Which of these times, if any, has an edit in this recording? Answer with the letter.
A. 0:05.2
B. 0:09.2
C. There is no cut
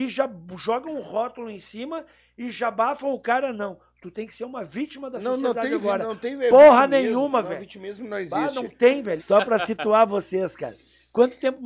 B